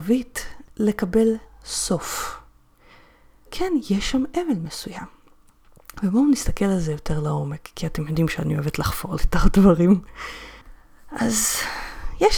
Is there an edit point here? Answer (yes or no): yes